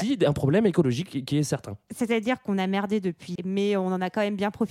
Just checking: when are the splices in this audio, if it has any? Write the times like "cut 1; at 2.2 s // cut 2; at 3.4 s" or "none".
cut 1; at 3.4 s